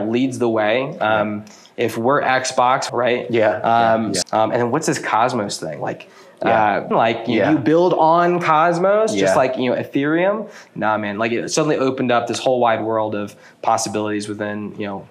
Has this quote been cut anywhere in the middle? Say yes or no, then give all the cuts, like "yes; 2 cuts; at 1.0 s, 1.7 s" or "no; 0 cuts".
yes; 3 cuts; at 2.9 s, 4.2 s, 6.9 s